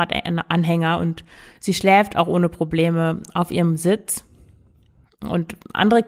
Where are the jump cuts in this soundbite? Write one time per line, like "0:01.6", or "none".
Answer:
none